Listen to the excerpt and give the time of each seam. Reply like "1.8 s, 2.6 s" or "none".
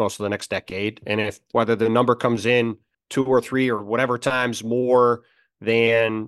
1.5 s